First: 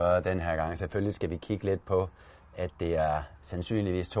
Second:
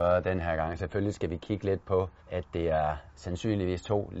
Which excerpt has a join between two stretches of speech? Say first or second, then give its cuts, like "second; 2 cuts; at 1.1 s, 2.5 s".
second; 1 cut; at 2.2 s